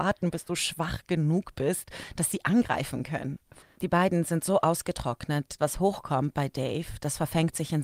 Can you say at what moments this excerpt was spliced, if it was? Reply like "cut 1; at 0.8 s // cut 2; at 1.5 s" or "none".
cut 1; at 3.7 s // cut 2; at 5.6 s